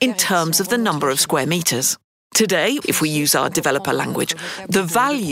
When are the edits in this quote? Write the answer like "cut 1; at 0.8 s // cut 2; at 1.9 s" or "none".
cut 1; at 2.8 s

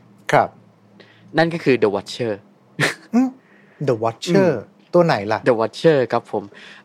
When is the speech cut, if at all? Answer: none

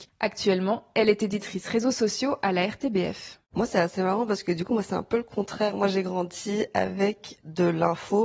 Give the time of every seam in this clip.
cut 1; at 3.5 s

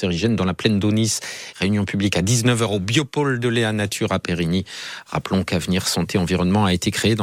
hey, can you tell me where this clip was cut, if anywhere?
cut 1; at 1.5 s

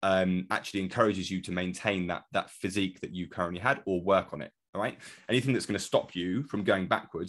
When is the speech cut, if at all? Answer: none

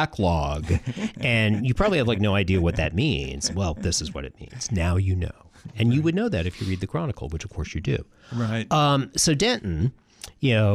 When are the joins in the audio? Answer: none

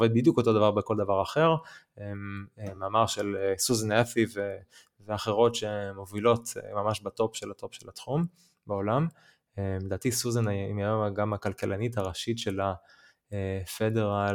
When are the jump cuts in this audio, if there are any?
none

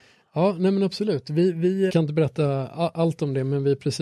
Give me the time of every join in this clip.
cut 1; at 1.9 s

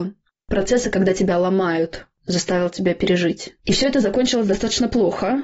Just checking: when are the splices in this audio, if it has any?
cut 1; at 3.6 s

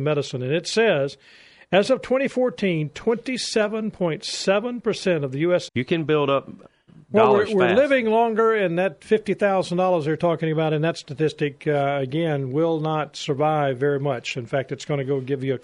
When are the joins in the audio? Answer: cut 1; at 5.7 s

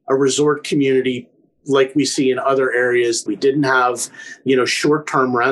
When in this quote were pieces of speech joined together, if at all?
cut 1; at 3.3 s

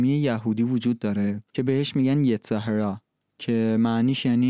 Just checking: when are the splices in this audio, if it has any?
cut 1; at 1.5 s

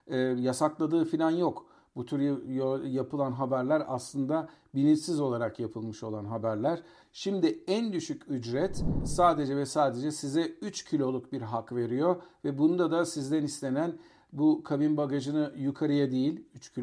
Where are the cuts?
cut 1; at 7.0 s

